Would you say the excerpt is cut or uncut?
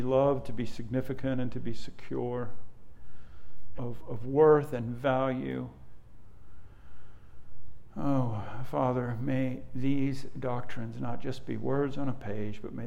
cut